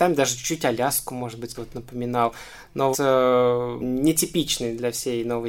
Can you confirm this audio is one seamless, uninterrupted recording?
no; 2 cuts; at 1.5 s, 2.9 s

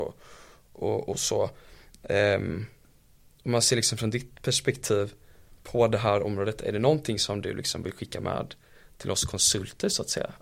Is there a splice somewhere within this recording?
no; 0 cuts

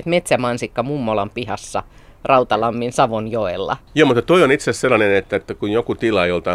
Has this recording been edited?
yes; 1 cut; at 3.9 s

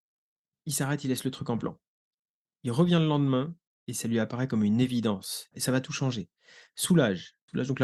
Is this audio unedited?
no; 1 cut; at 5.5 s

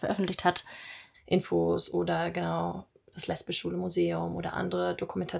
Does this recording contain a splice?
yes; 1 cut; at 1.1 s

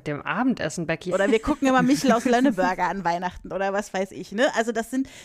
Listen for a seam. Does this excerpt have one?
yes; 1 cut; at 1.1 s

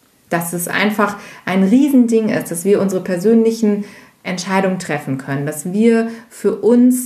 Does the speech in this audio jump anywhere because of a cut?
no; 0 cuts

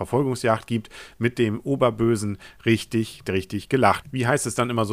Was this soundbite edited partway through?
yes; 1 cut; at 4.0 s

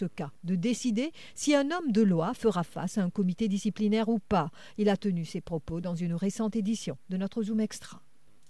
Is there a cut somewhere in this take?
no; 0 cuts

